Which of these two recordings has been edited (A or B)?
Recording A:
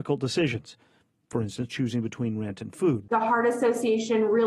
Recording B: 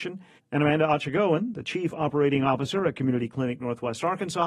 A